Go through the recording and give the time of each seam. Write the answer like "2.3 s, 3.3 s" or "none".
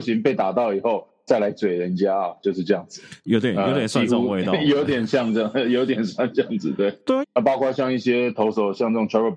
3.2 s, 7.2 s